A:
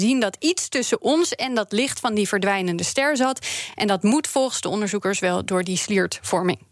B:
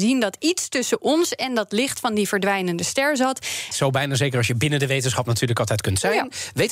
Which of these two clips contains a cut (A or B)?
B